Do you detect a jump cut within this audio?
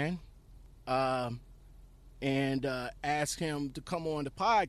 no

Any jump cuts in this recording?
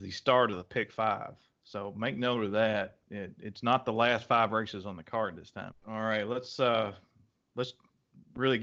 yes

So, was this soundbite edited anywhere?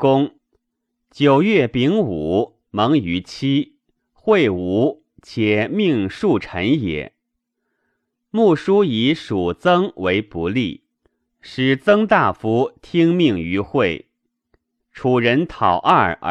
yes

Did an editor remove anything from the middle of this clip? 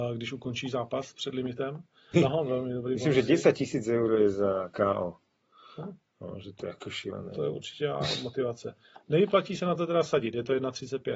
yes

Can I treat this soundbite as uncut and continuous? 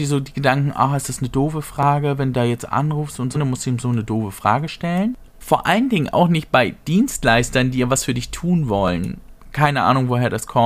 no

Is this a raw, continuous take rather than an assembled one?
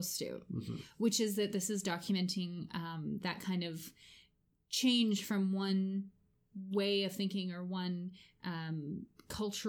yes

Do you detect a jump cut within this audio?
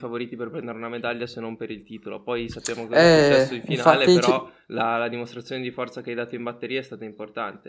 no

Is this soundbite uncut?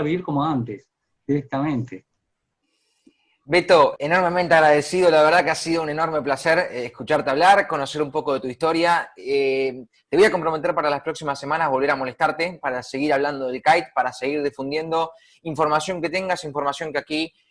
no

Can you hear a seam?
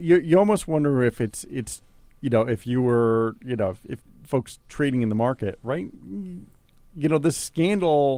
yes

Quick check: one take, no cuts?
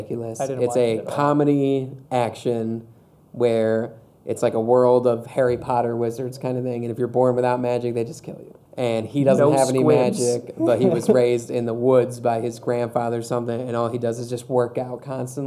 no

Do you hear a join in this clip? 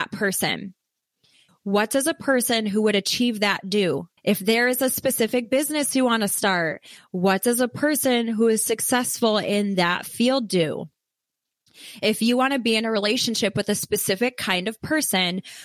yes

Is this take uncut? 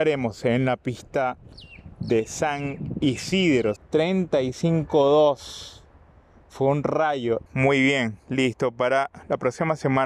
no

